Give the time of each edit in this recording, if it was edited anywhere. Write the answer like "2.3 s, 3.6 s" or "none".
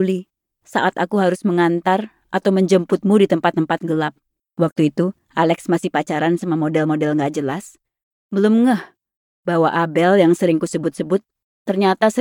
4.4 s

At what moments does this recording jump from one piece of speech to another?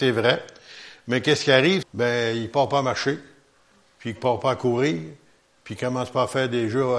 1.8 s

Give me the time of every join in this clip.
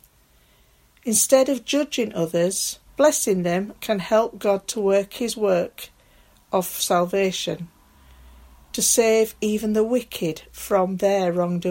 2.9 s

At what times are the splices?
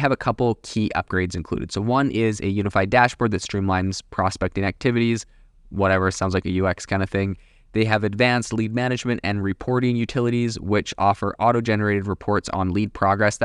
none

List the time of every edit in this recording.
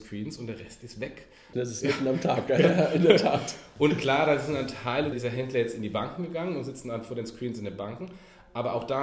1.5 s, 5.1 s

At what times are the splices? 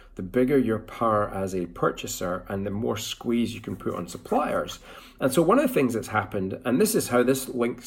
none

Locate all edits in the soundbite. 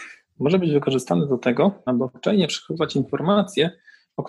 1.9 s

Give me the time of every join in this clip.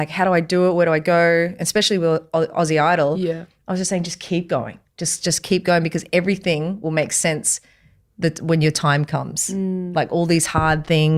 none

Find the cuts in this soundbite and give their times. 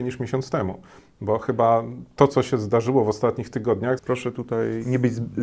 4.0 s

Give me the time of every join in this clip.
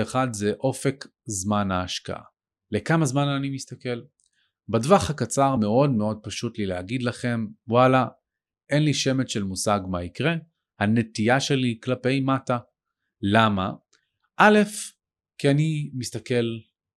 none

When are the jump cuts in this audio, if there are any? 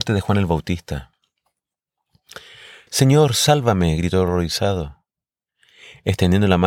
2.9 s

